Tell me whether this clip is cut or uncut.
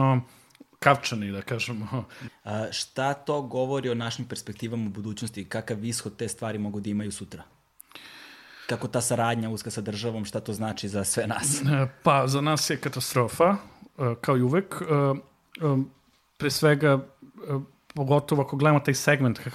cut